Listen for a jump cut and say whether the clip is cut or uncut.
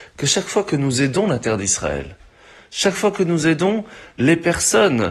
uncut